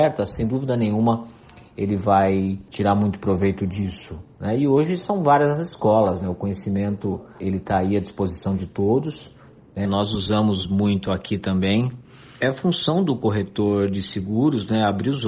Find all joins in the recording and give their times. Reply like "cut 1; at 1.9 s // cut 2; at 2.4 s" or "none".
cut 1; at 9.8 s // cut 2; at 12.4 s